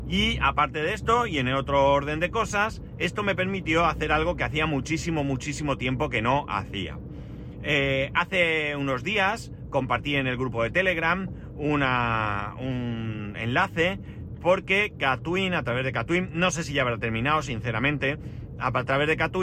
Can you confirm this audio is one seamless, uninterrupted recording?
yes; 0 cuts

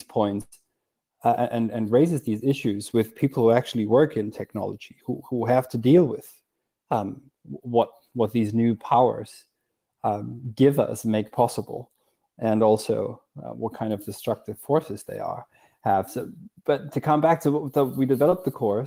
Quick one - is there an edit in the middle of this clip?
no; 0 cuts

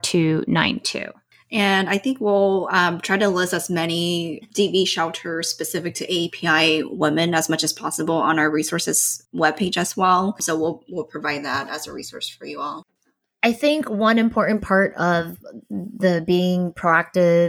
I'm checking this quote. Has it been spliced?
no; 0 cuts

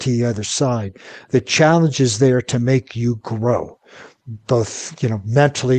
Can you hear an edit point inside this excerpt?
no; 0 cuts

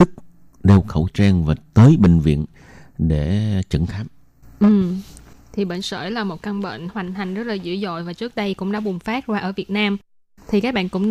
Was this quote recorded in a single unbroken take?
yes; 0 cuts

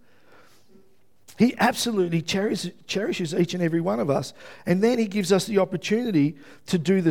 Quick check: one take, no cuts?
yes; 0 cuts

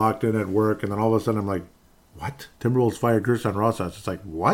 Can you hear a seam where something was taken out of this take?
yes; 1 cut; at 2.5 s

